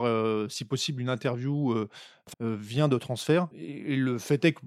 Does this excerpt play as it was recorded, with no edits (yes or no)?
no